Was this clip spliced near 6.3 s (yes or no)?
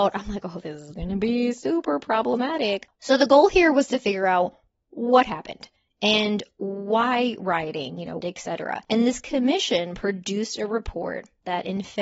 no